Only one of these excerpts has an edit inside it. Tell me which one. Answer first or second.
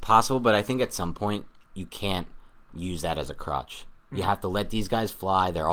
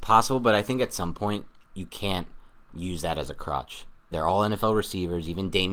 second